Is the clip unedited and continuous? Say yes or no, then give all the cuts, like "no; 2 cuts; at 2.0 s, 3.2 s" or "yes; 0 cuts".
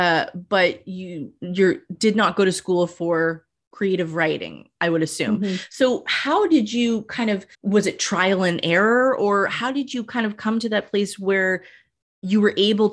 no; 1 cut; at 7.5 s